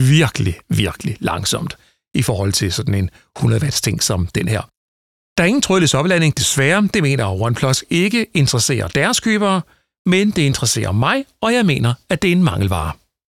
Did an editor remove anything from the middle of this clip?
no; 0 cuts

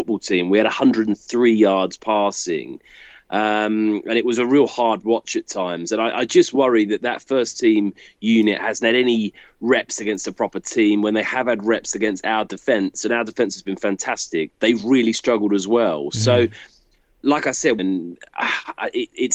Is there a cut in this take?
yes; 2 cuts; at 14.5 s, 17.8 s

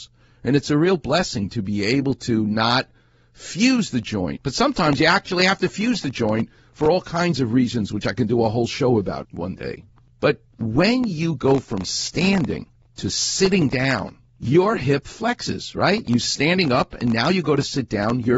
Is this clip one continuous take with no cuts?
no; 1 cut; at 9.2 s

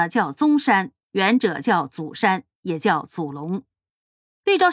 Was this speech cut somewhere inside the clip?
no; 0 cuts

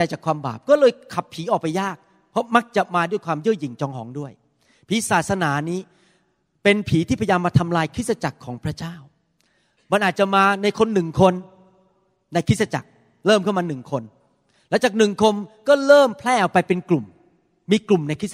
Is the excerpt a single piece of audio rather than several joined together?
yes; 0 cuts

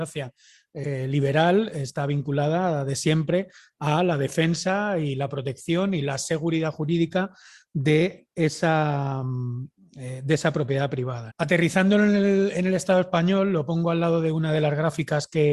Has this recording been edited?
yes; 1 cut; at 11.3 s

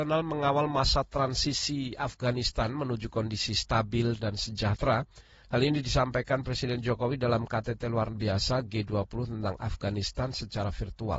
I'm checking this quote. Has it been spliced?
yes; 1 cut; at 4.2 s

